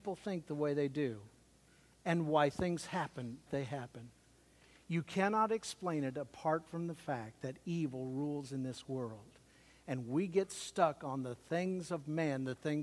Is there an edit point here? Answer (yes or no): yes